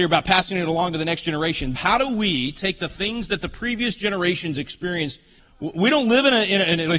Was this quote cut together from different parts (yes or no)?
yes